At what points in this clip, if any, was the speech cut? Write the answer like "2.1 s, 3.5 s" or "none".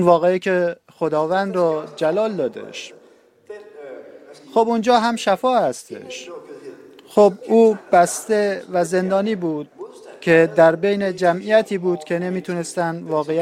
4.4 s